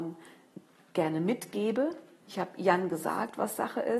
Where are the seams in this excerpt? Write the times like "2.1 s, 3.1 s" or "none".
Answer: 2.2 s